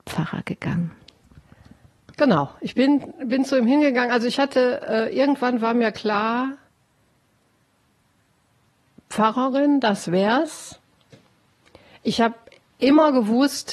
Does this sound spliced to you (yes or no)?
no